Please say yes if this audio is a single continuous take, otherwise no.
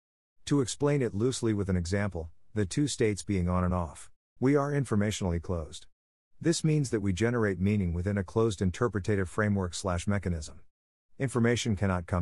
no